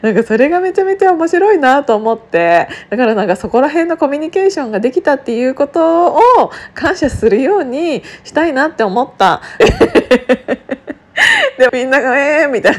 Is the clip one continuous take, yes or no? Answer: no